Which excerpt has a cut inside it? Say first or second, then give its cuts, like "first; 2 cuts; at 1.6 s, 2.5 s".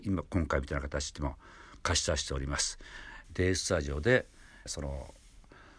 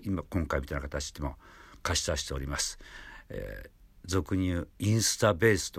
first; 2 cuts; at 3.2 s, 4.7 s